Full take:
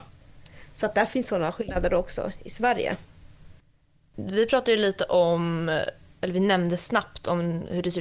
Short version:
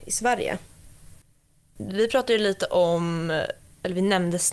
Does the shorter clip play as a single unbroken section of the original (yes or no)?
yes